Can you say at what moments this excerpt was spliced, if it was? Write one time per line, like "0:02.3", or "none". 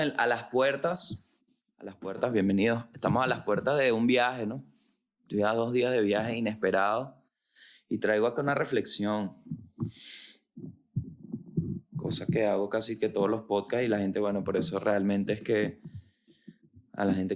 none